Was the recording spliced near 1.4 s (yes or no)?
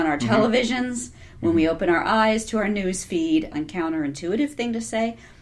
no